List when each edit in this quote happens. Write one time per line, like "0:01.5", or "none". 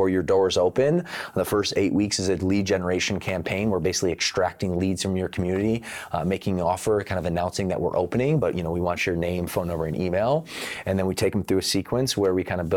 none